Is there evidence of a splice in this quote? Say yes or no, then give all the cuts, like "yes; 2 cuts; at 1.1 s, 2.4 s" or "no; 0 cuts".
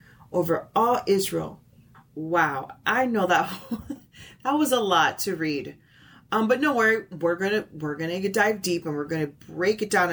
yes; 1 cut; at 1.9 s